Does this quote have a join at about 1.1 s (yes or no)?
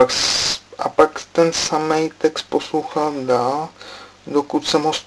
no